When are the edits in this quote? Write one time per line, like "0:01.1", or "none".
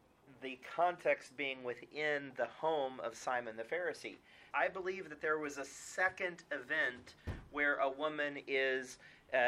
0:04.5